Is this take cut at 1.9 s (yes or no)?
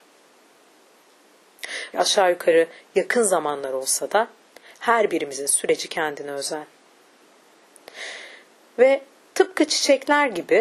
yes